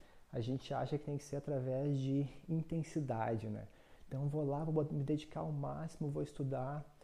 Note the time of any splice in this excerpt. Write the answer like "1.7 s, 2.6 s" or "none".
none